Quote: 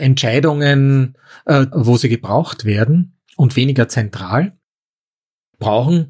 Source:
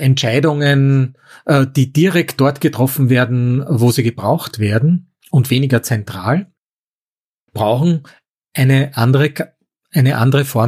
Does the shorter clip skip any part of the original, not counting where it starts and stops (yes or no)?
yes